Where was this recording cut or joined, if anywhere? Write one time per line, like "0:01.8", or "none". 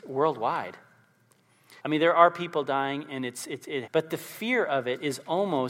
0:01.8
0:03.8